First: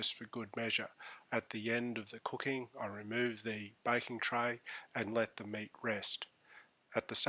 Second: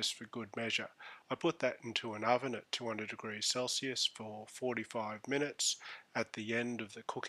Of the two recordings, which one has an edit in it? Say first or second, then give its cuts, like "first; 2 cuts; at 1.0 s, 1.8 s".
first; 1 cut; at 1.2 s